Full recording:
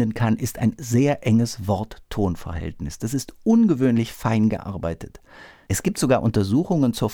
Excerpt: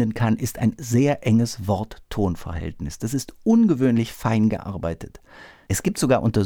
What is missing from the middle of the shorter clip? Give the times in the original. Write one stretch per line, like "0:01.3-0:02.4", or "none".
none